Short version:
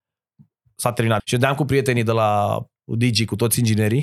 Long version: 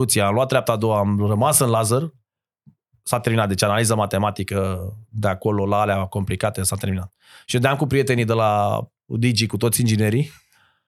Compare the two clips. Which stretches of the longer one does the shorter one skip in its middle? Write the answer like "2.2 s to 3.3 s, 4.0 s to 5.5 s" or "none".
3.5 s to 7.4 s